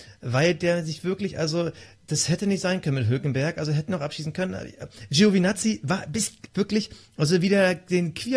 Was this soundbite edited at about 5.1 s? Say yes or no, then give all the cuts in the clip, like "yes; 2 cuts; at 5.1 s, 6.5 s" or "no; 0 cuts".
no; 1 cut; at 6.5 s